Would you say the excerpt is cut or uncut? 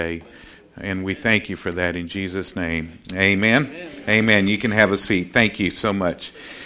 uncut